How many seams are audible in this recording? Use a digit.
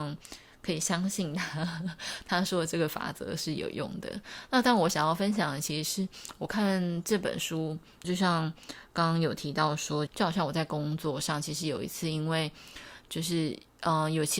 2